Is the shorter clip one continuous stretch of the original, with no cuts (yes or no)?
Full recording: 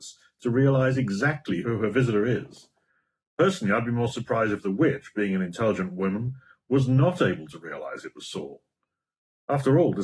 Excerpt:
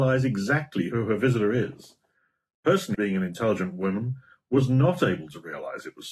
no